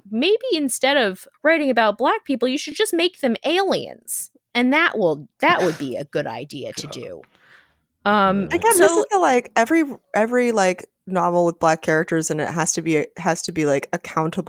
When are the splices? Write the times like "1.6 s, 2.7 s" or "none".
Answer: none